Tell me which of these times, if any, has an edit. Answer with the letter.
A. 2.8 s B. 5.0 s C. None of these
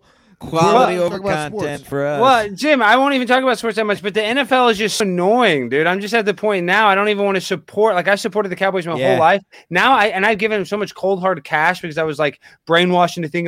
B